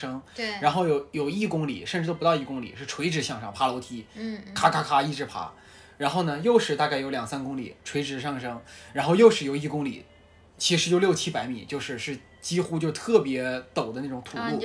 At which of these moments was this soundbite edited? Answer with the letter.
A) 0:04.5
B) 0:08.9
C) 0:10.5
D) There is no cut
D